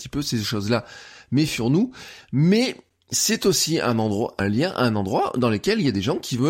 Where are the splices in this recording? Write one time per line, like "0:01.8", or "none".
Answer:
0:04.4